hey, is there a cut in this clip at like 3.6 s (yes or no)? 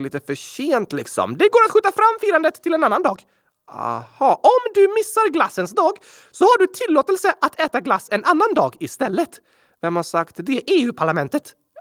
no